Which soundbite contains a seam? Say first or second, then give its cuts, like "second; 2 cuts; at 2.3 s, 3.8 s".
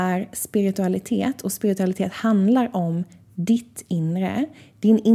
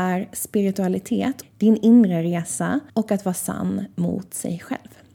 second; 2 cuts; at 1.4 s, 2.9 s